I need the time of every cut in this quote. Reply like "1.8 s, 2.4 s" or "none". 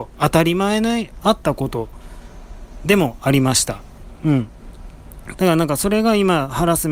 5.3 s